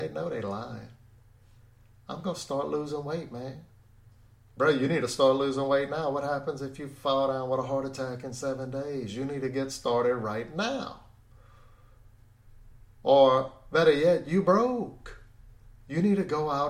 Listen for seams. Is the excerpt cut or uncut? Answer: uncut